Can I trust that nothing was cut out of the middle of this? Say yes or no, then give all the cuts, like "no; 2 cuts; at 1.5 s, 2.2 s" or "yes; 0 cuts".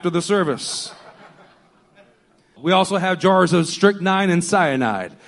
no; 1 cut; at 2.6 s